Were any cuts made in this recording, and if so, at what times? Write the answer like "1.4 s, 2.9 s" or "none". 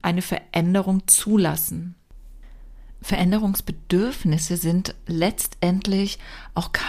none